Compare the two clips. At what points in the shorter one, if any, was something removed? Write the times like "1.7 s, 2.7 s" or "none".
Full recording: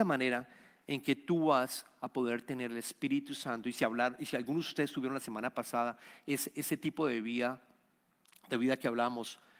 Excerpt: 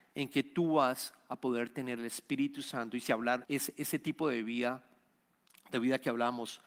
3.4 s